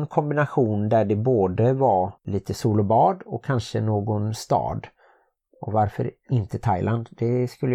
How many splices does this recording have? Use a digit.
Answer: 1